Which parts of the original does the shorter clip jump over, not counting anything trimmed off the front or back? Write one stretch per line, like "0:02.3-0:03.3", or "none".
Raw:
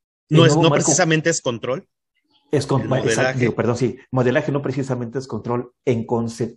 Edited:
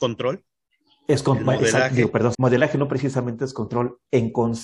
0:03.8-0:04.1